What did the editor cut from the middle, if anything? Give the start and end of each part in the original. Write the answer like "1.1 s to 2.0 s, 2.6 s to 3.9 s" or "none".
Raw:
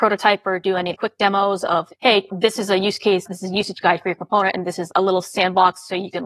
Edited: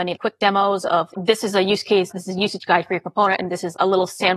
1.9 s to 2.3 s